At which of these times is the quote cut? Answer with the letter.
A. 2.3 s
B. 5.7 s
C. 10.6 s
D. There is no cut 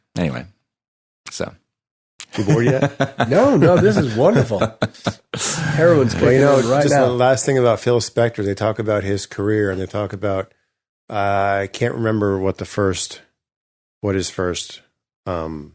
D